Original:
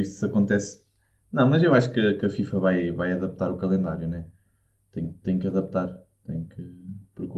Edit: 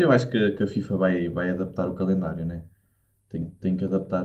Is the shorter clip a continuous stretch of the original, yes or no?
yes